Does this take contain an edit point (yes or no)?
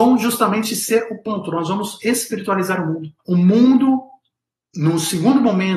yes